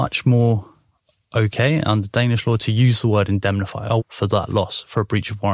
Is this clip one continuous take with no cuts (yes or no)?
no